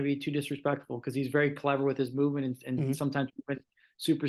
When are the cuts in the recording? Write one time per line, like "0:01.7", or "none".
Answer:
none